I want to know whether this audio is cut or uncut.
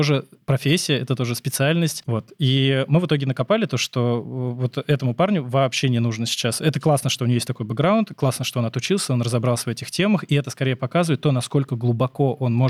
cut